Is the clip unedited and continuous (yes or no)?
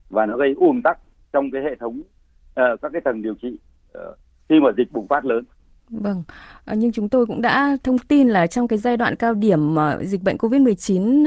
yes